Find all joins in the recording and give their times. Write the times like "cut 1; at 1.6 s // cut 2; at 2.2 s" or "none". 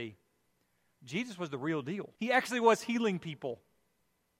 cut 1; at 2.1 s